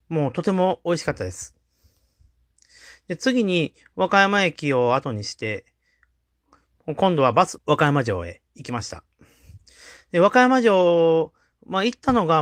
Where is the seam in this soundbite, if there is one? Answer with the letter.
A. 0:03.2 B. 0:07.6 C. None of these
B